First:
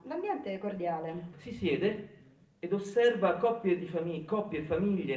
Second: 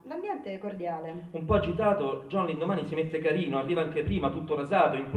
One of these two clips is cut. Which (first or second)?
first